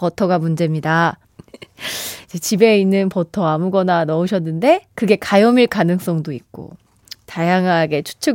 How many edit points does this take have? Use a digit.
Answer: 1